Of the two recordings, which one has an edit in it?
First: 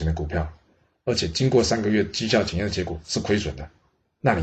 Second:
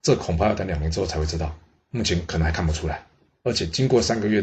second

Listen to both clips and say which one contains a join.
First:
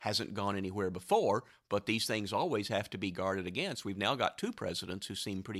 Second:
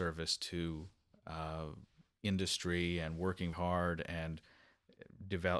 second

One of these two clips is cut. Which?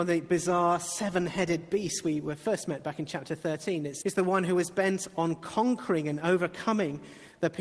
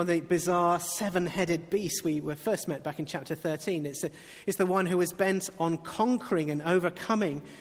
first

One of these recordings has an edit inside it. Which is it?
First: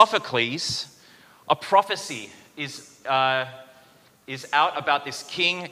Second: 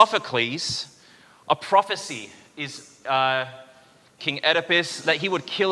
second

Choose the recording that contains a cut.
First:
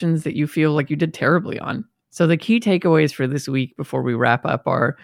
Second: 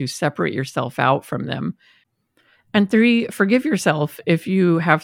first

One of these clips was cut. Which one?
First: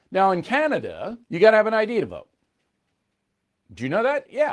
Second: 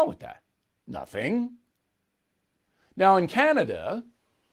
first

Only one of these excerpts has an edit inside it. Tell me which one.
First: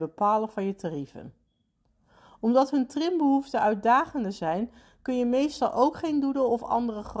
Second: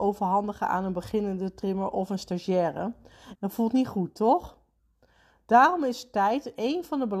second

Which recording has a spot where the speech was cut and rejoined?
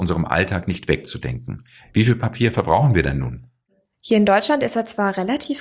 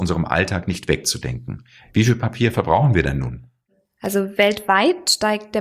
first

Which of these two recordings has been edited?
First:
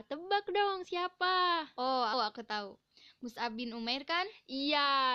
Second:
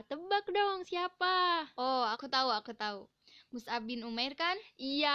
first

